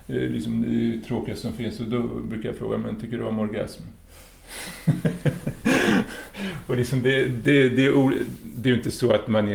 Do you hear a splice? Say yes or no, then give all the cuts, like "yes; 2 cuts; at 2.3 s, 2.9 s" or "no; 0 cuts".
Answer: no; 0 cuts